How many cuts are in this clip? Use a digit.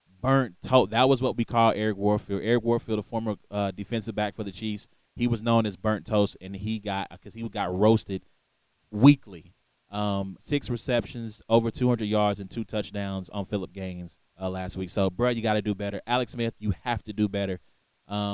2